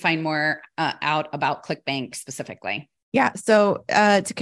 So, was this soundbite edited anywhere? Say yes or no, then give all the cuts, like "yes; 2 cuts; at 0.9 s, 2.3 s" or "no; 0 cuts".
no; 0 cuts